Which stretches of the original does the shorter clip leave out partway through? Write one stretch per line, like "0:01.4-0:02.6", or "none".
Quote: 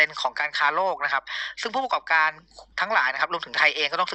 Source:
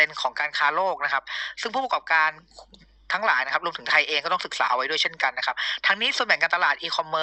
0:02.7-0:03.0